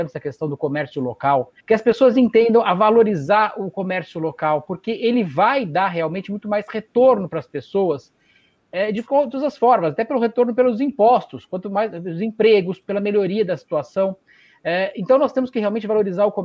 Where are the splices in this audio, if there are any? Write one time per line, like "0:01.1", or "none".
0:01.6
0:12.8